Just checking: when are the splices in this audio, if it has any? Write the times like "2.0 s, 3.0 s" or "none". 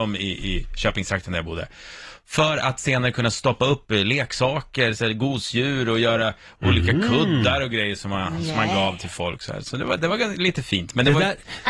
none